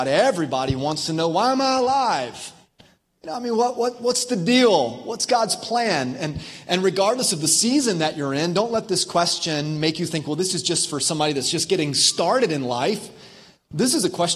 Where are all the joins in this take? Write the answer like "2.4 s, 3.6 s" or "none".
none